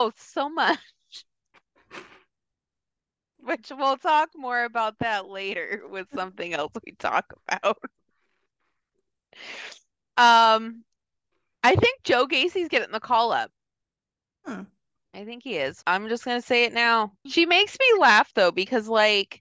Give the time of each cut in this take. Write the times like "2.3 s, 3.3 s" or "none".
15.8 s, 17.3 s